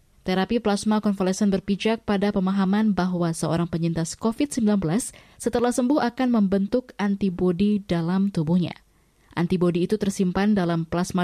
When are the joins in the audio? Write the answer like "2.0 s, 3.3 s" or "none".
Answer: none